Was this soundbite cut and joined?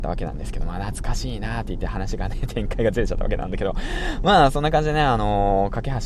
no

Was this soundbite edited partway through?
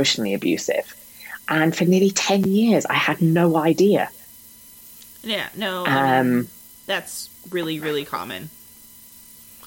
no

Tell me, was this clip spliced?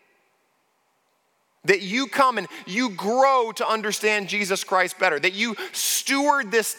yes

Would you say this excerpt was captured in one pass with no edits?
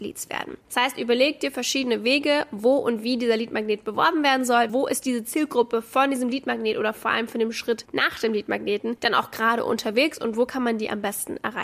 no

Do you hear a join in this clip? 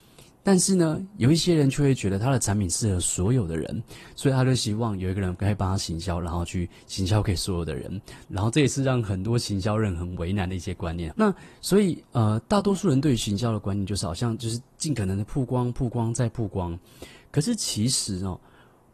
yes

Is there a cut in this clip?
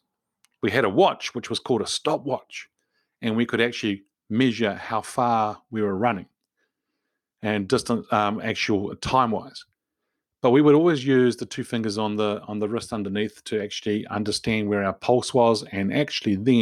no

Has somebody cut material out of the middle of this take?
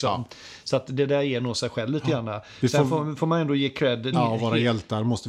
yes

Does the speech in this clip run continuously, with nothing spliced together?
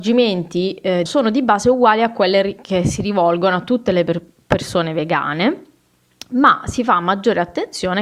no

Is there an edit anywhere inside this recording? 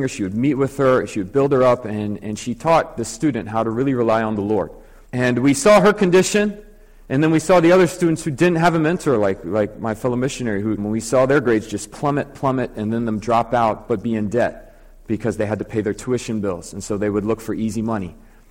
yes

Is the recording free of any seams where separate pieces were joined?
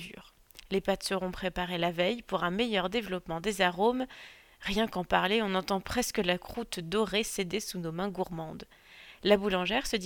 yes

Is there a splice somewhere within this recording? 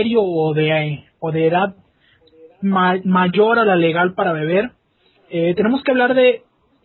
no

